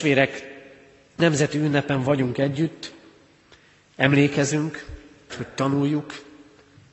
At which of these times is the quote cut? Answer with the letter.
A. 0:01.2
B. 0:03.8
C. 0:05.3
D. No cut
C